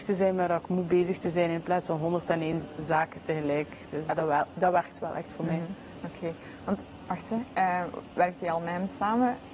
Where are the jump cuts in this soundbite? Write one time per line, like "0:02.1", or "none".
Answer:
0:04.1